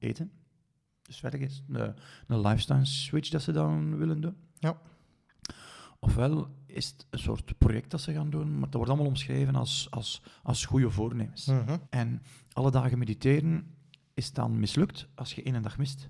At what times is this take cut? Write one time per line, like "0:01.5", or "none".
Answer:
0:11.9